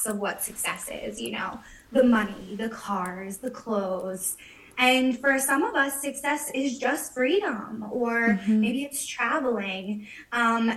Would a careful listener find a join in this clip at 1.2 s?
no; 0 cuts

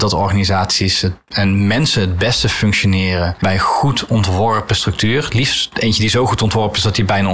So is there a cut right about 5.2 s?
no; 0 cuts

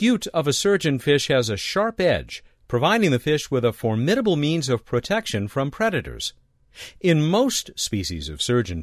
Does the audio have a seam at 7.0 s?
no; 0 cuts

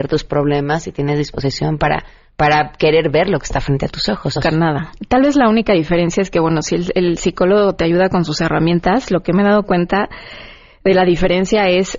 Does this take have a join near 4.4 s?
yes; 1 cut; at 4.4 s

